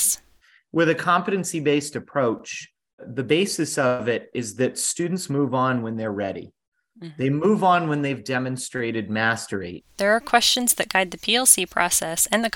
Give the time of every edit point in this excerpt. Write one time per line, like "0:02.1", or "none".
0:03.0
0:09.9